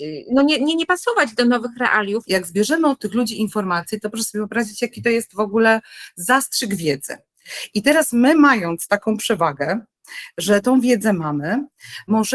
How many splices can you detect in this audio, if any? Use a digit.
1